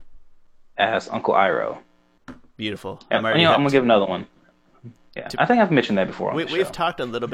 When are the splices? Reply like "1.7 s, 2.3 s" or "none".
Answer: 5.0 s